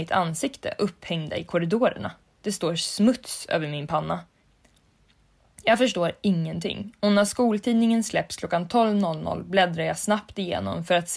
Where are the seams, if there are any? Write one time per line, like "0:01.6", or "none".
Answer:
none